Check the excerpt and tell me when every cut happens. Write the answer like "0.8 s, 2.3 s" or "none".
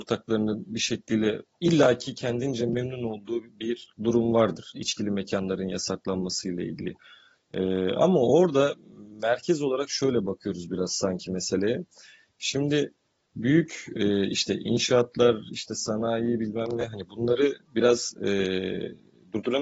none